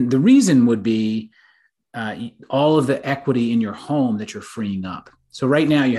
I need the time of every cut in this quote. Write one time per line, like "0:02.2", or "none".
none